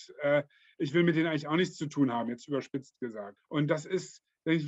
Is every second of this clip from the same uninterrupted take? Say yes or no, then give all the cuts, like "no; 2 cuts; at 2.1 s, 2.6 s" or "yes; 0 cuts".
no; 1 cut; at 3.4 s